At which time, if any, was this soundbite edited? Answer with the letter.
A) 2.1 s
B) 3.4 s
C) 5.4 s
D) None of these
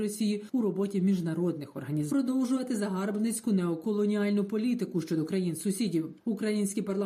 A